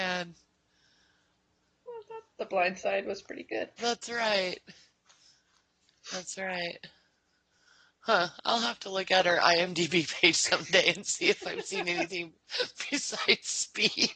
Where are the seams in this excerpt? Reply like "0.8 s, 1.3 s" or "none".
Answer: 3.8 s

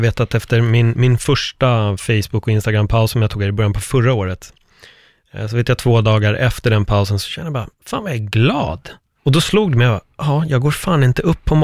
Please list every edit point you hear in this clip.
9.2 s

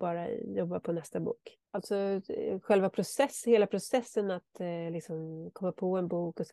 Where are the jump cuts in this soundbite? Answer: 1.6 s

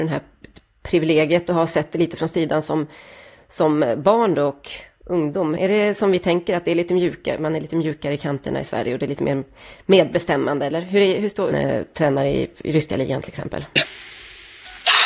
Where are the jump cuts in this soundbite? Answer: 5.6 s, 11.5 s

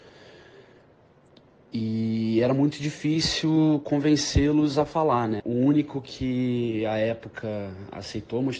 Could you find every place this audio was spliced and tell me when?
5.4 s

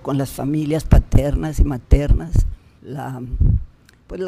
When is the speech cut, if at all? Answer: 2.8 s

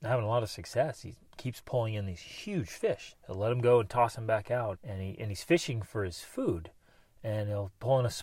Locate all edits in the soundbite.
3.1 s, 4.7 s

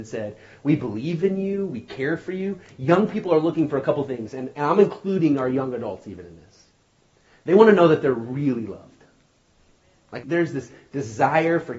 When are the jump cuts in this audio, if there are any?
10.2 s

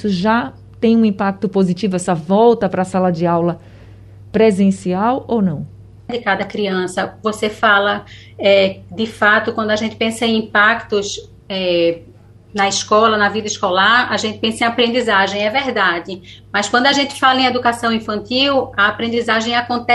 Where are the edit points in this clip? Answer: 6.1 s

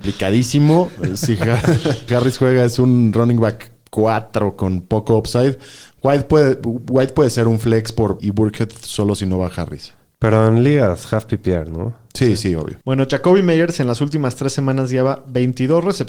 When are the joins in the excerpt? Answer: 2.1 s, 8.2 s, 12.8 s

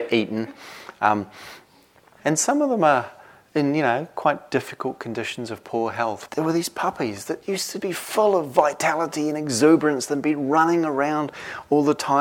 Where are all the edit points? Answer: 2.2 s, 6.3 s, 7.8 s

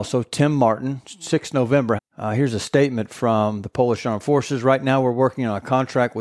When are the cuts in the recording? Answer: 2.0 s

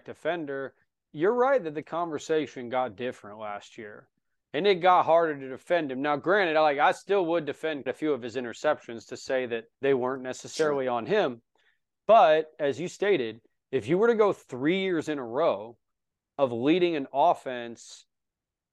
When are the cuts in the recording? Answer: 7.9 s, 9.7 s

